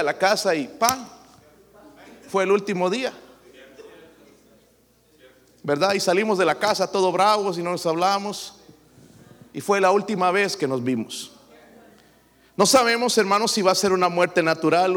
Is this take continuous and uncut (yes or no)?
yes